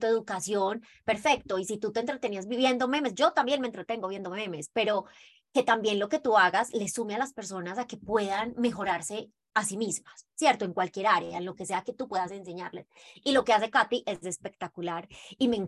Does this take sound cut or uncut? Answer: uncut